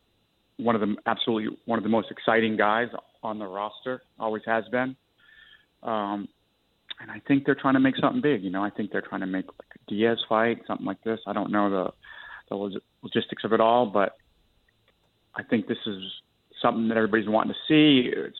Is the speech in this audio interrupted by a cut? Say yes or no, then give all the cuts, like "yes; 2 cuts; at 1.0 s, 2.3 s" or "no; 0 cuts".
no; 0 cuts